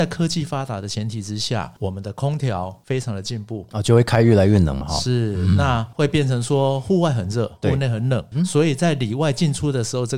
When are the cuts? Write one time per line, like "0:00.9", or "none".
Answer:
none